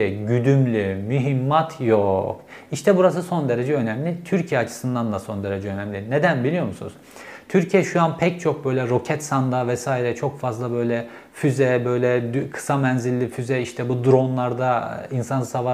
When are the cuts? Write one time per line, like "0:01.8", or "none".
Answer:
none